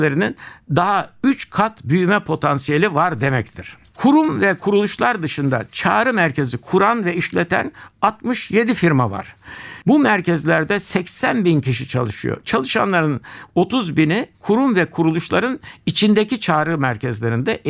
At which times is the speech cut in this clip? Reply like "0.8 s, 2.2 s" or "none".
9.8 s